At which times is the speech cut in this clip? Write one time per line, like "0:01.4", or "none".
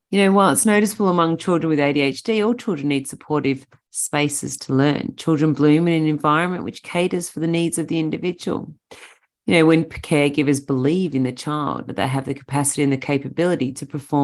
none